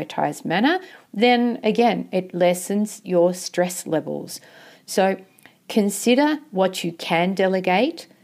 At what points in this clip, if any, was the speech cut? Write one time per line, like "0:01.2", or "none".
none